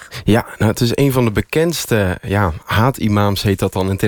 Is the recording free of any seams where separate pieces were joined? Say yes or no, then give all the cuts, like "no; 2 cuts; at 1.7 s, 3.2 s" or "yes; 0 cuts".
yes; 0 cuts